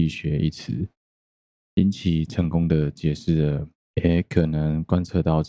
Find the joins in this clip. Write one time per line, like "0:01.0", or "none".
0:03.9